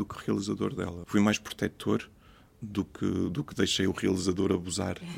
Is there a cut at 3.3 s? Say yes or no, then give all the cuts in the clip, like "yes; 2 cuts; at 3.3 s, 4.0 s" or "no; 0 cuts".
no; 1 cut; at 1.0 s